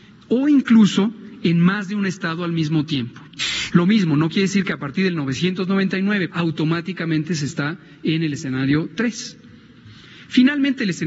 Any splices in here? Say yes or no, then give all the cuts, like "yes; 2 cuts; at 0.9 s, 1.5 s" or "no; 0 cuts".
yes; 2 cuts; at 3.7 s, 6.3 s